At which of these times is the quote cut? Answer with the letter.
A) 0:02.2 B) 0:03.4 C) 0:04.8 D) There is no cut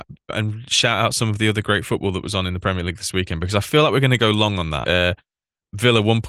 C